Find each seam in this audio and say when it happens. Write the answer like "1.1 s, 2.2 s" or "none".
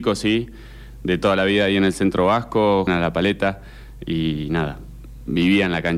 2.9 s